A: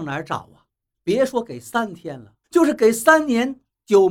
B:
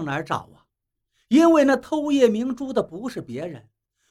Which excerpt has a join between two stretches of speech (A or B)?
A